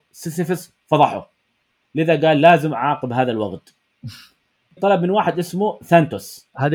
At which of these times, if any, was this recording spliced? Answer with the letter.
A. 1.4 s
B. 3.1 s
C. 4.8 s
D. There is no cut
C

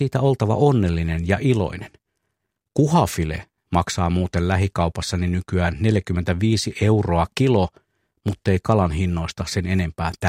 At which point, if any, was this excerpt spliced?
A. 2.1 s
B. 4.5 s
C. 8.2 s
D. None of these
D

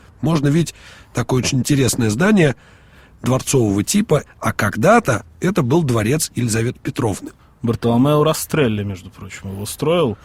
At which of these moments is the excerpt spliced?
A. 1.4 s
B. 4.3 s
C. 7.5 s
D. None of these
B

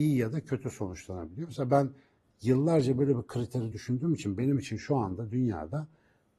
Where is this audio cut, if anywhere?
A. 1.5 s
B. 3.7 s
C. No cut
B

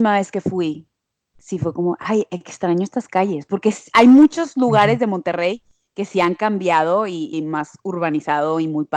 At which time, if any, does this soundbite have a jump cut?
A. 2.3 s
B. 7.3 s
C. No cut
B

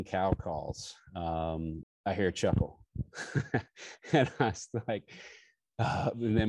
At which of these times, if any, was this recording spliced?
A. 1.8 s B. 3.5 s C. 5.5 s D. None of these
A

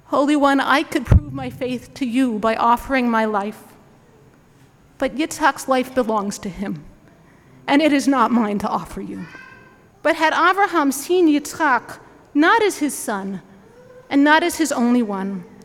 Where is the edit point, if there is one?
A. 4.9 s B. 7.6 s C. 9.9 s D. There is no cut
C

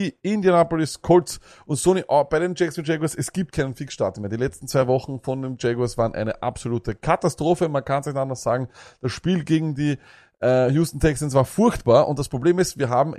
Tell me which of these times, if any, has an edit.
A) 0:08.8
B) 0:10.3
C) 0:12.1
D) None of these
D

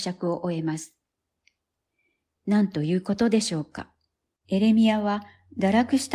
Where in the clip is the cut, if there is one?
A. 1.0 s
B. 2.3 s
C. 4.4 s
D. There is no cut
C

